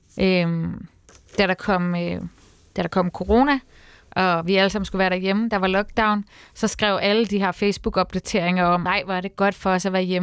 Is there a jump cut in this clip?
yes; 1 cut; at 8.9 s

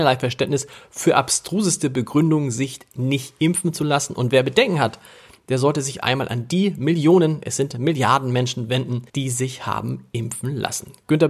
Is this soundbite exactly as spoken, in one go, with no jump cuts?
no; 1 cut; at 9.1 s

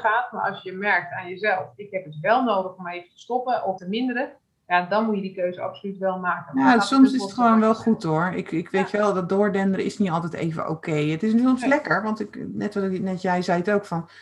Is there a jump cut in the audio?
yes; 1 cut; at 3.8 s

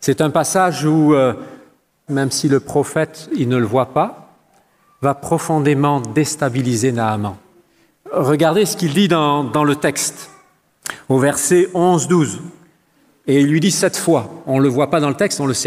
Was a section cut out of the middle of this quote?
yes; 2 cuts; at 2.1 s, 13.2 s

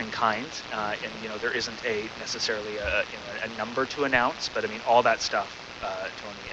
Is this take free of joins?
yes; 0 cuts

